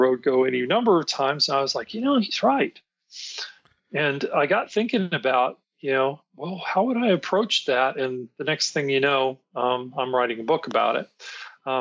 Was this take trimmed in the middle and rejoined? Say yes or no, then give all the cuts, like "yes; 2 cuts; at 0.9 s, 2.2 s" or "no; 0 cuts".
no; 0 cuts